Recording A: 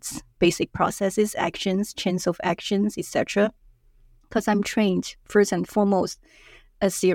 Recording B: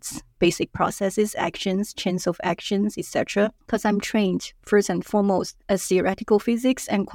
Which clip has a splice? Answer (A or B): B